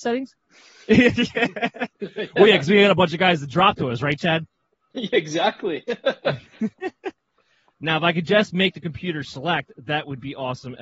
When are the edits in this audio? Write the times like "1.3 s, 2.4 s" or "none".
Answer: none